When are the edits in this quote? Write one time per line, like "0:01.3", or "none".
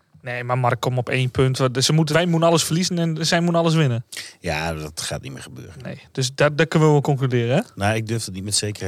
0:02.1